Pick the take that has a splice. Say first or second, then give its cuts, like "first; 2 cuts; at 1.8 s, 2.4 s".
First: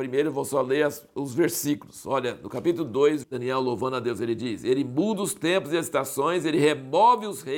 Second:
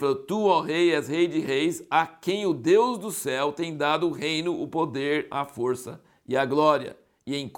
first; 1 cut; at 3.2 s